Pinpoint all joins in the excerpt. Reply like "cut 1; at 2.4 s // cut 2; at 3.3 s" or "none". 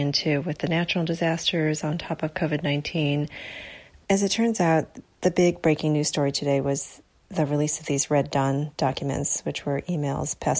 cut 1; at 4.0 s // cut 2; at 5.1 s